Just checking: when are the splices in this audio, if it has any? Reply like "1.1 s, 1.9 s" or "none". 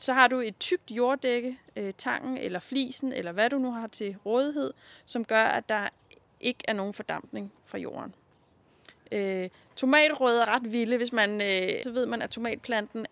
10.4 s, 11.8 s

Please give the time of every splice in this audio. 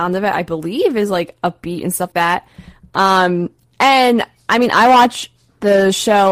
2.1 s

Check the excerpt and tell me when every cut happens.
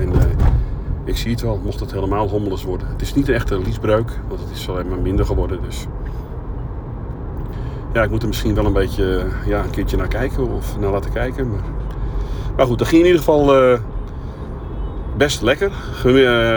none

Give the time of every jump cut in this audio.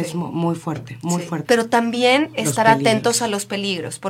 1.5 s

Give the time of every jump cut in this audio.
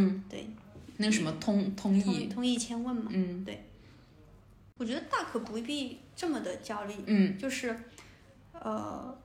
none

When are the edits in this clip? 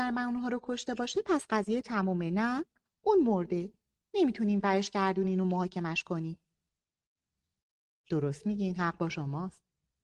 none

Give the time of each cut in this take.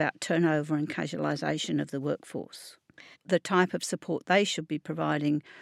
3.1 s

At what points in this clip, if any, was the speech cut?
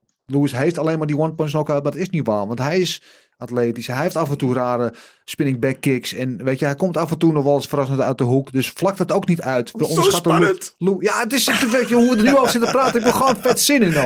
none

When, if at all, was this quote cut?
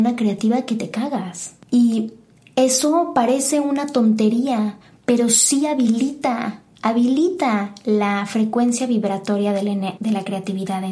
none

